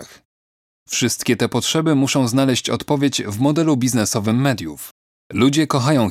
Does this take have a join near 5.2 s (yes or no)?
yes